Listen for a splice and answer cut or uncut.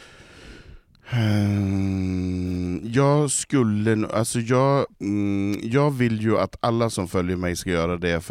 cut